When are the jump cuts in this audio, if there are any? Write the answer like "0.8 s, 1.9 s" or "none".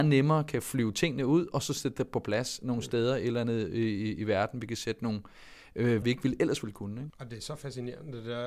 6.0 s, 7.1 s

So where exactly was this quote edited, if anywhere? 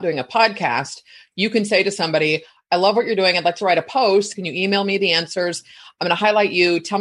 4.3 s

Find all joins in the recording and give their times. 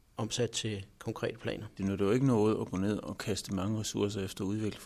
none

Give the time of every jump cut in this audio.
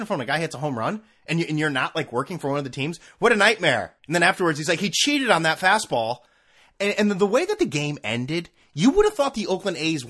4.0 s

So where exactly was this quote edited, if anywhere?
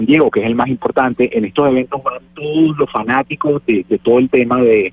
none

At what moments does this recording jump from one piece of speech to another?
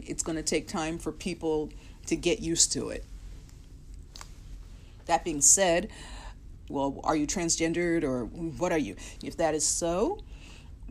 6.7 s, 9.2 s

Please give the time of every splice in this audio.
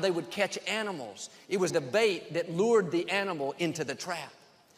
1.7 s

